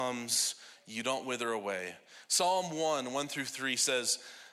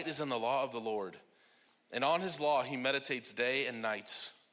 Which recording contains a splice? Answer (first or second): first